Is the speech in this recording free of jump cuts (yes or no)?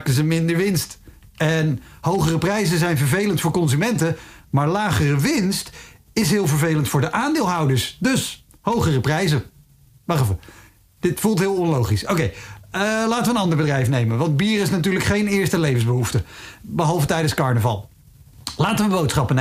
yes